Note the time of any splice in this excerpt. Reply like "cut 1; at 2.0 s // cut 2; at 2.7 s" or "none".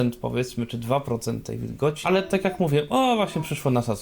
cut 1; at 2.0 s